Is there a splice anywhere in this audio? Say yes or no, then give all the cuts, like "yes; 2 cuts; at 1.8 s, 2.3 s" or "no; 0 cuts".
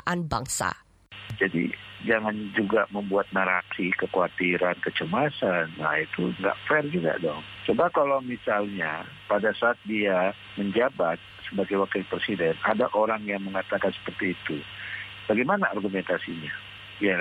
yes; 1 cut; at 6.4 s